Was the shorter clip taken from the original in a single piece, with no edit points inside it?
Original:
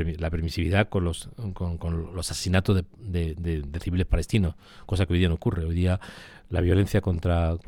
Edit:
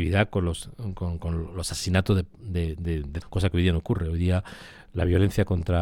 no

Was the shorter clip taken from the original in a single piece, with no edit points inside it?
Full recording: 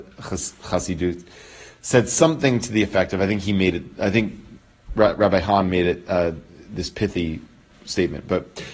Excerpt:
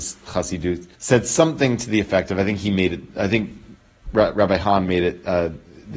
no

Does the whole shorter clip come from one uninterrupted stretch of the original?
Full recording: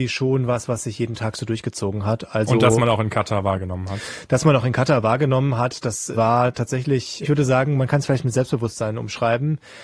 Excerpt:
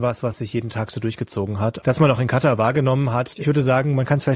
no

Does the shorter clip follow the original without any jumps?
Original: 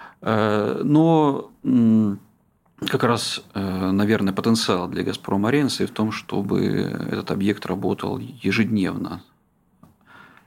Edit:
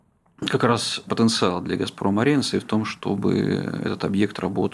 no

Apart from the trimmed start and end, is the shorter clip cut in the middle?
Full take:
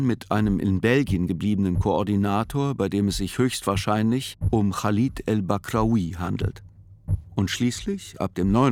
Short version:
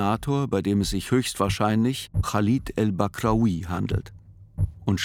yes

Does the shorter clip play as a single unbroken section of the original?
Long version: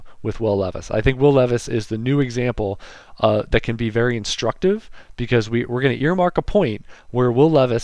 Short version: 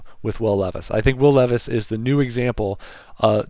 yes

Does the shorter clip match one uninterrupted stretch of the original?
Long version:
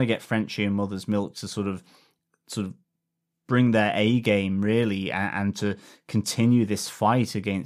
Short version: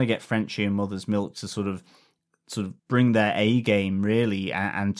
no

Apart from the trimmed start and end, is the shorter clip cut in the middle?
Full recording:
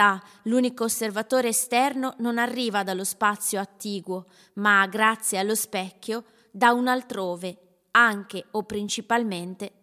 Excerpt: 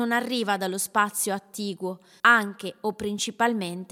yes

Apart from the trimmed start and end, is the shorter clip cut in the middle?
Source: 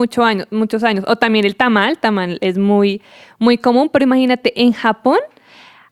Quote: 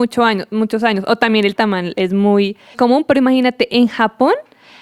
yes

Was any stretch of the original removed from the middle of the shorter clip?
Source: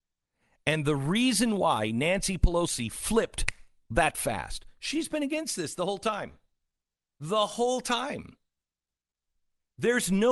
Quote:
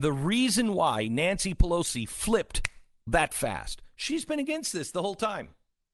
no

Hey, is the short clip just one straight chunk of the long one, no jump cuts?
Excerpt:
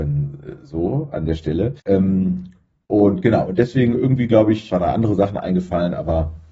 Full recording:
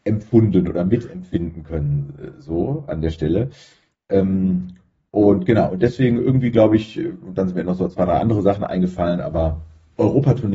no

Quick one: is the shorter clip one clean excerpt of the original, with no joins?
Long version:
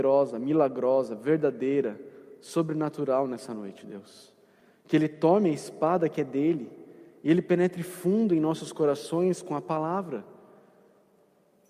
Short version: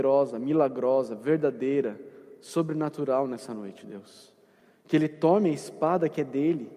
yes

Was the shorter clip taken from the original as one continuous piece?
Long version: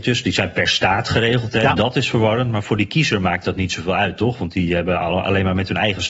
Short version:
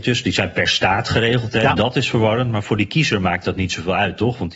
yes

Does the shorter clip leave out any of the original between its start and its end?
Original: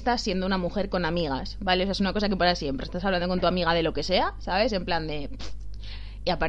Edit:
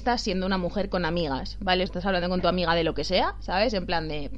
yes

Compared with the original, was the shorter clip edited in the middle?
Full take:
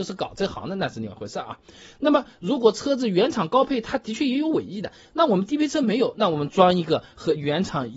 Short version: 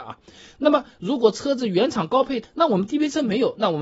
yes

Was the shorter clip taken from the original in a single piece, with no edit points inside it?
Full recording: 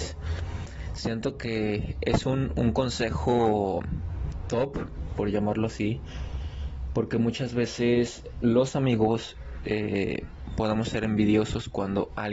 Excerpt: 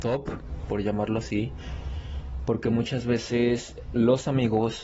yes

